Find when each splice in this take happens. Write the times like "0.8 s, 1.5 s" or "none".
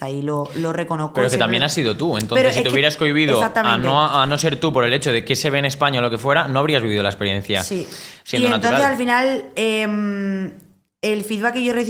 none